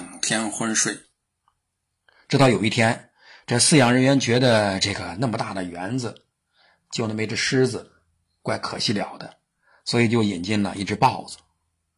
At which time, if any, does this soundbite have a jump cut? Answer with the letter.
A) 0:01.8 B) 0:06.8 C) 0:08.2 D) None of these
D